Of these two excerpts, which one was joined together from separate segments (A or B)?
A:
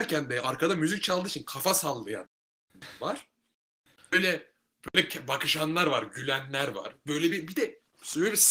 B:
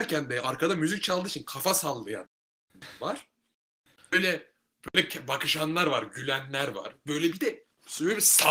B